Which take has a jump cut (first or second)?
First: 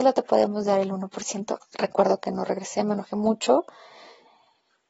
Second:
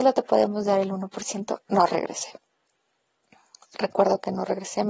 first